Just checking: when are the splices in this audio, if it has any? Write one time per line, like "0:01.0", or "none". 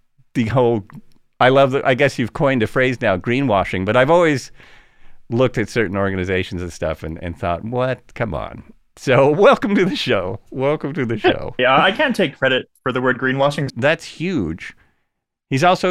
0:11.6
0:13.7